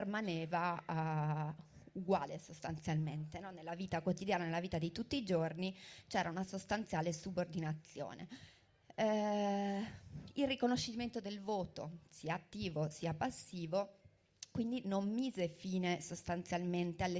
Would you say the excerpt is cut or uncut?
uncut